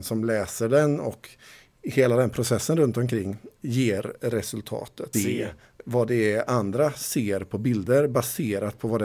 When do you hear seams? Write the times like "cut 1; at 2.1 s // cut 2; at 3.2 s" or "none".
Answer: cut 1; at 5.1 s